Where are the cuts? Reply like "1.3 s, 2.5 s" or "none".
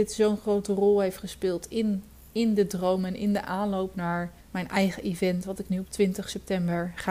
4.4 s